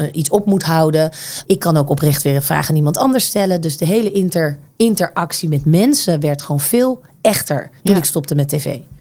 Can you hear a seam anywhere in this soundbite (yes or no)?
yes